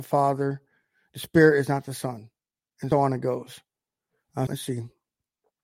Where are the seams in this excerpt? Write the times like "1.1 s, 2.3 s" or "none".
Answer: 2.9 s, 4.5 s